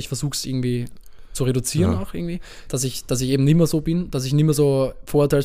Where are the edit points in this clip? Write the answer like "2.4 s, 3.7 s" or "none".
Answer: none